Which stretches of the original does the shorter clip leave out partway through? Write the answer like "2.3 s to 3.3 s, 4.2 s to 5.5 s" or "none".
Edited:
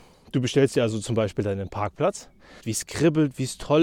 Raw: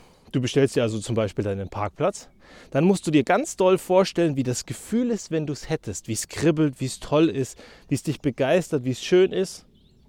2.6 s to 6.0 s